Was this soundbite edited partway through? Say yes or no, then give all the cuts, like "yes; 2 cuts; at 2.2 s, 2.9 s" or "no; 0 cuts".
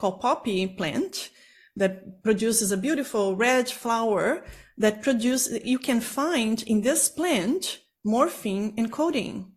yes; 1 cut; at 5.6 s